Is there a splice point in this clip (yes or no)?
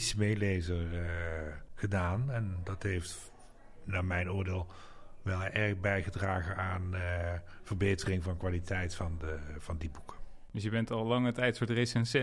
no